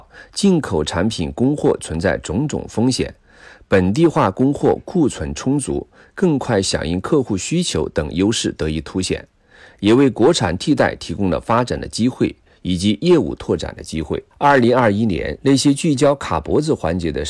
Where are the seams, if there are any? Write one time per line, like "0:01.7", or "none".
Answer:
0:14.3
0:15.4